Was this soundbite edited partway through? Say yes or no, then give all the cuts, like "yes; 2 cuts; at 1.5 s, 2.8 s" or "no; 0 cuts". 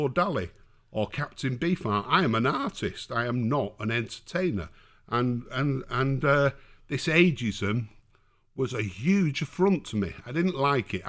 no; 0 cuts